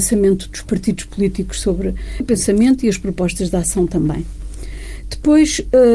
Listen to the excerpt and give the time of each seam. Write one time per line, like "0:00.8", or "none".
0:02.2